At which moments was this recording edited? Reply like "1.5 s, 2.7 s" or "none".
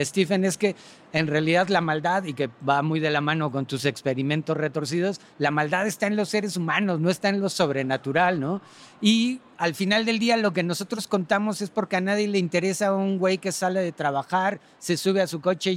none